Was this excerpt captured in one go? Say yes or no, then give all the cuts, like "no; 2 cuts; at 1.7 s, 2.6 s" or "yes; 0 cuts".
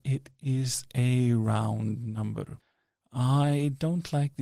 yes; 0 cuts